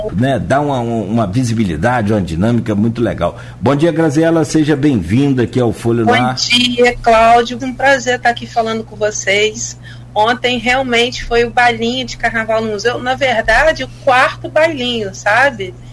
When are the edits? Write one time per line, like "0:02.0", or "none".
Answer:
0:07.6